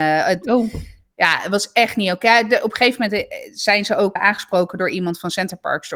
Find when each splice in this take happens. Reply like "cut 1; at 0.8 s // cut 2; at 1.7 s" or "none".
cut 1; at 4.2 s